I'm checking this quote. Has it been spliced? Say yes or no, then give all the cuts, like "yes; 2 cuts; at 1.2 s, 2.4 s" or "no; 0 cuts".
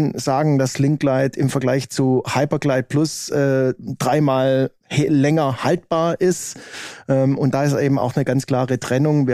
yes; 1 cut; at 4.8 s